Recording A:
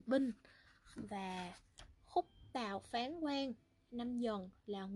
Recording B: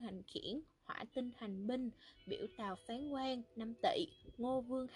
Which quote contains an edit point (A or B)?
B